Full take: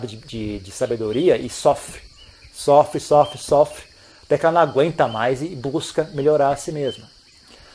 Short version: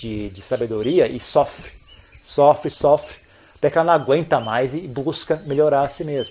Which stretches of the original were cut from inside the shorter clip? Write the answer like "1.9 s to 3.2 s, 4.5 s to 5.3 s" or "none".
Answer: 3.0 s to 3.4 s